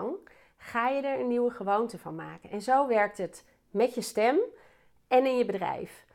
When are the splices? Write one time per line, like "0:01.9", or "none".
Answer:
none

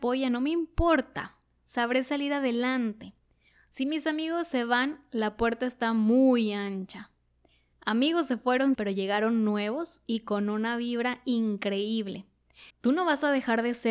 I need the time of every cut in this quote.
0:07.7
0:08.7
0:12.7

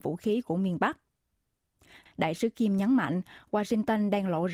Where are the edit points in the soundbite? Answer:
0:02.1

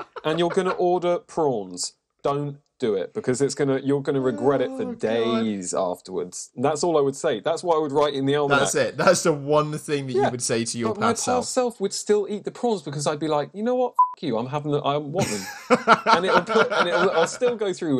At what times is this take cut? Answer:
none

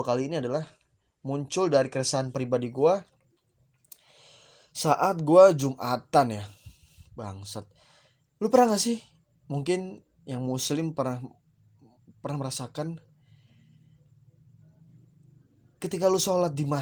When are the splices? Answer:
none

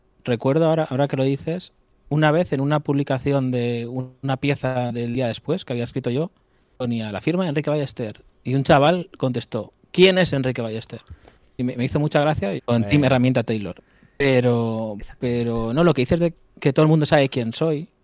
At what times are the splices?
0:12.6

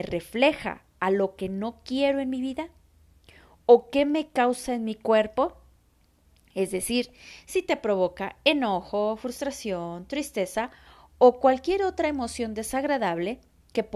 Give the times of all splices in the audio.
none

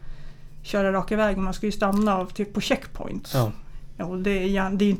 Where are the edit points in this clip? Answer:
none

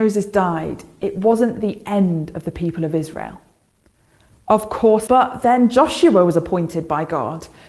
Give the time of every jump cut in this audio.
0:05.1

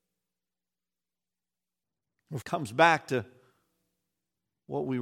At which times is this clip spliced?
0:02.4

